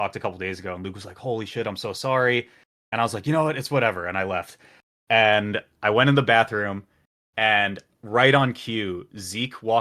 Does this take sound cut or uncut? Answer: uncut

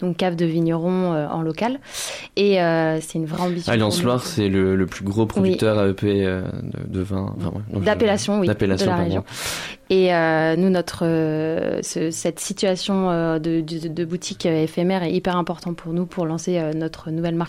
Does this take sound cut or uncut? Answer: uncut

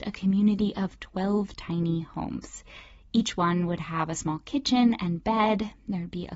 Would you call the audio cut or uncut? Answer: uncut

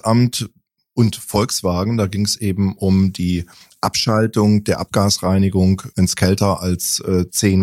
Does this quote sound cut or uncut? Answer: cut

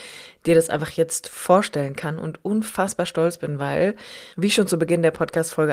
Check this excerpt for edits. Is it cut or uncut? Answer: cut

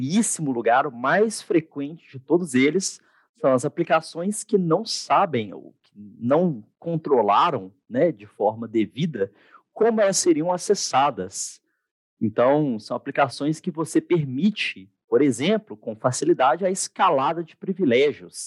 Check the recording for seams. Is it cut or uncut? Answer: uncut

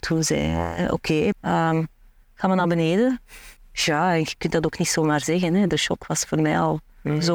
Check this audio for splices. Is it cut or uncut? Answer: cut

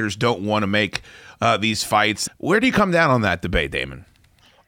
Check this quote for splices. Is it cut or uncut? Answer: cut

